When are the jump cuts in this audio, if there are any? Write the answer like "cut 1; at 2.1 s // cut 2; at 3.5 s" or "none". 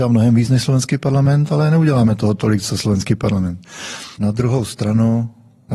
cut 1; at 4.1 s